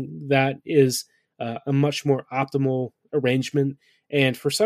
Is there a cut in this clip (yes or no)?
no